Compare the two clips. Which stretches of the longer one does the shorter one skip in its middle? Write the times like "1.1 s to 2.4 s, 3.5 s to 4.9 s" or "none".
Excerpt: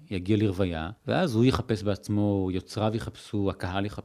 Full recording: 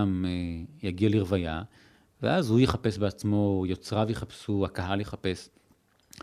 1.7 s to 2.1 s